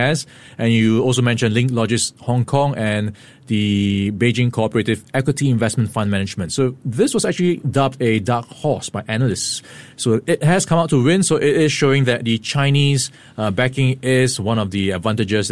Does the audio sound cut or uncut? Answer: uncut